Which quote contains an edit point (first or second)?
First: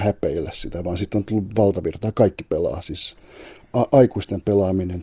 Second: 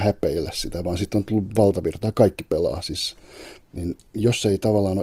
second